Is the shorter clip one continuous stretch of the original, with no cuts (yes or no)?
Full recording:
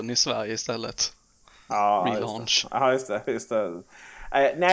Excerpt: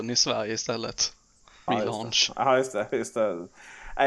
no